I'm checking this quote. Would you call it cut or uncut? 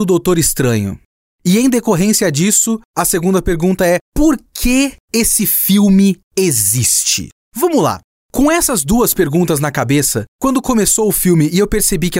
uncut